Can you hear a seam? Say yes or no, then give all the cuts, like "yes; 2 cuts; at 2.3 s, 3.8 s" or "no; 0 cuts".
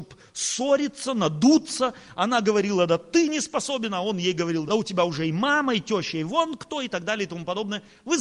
yes; 1 cut; at 4.7 s